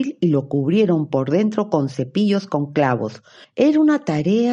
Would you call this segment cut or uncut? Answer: cut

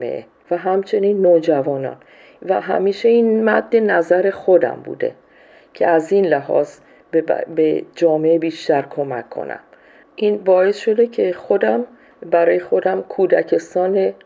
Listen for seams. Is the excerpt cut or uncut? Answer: uncut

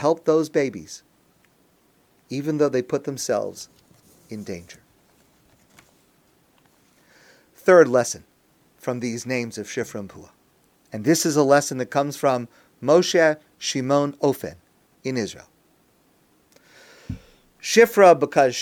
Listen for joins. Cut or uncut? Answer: uncut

